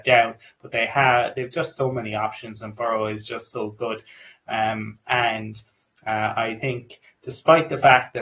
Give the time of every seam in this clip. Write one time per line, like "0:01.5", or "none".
none